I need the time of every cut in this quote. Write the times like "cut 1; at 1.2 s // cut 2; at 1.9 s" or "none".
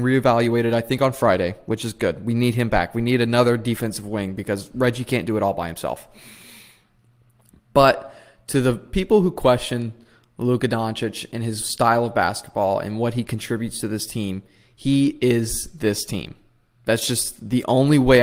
none